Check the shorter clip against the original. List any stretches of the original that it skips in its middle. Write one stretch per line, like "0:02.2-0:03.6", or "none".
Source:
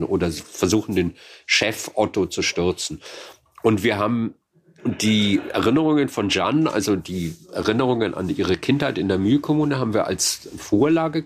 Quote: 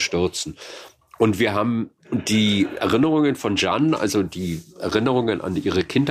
0:04.4-0:04.7